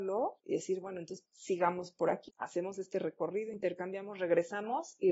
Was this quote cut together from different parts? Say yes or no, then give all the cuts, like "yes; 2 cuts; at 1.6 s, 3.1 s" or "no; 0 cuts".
no; 0 cuts